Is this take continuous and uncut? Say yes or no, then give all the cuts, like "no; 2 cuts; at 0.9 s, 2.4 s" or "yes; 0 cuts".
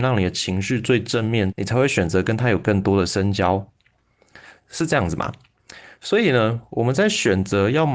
no; 1 cut; at 1.5 s